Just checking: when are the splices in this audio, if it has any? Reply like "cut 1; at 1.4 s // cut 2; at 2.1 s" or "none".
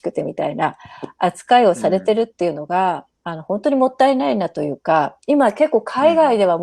cut 1; at 3.1 s